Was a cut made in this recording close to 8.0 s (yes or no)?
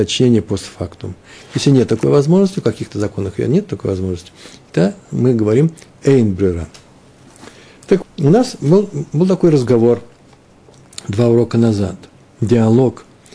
yes